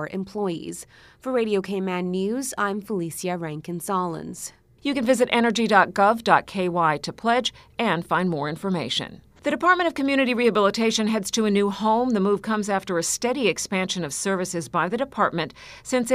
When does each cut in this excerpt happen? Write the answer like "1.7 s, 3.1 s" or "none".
9.4 s

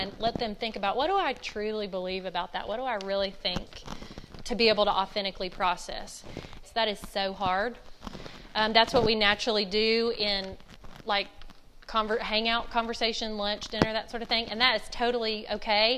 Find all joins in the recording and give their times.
6.6 s

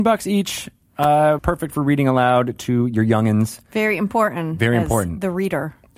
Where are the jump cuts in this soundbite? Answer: 1.4 s

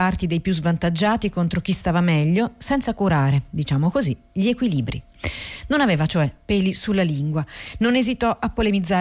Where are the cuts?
none

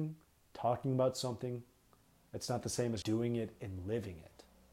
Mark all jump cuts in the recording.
3.0 s

